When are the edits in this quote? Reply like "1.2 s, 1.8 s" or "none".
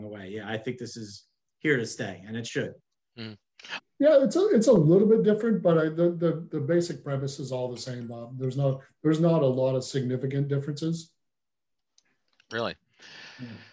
3.8 s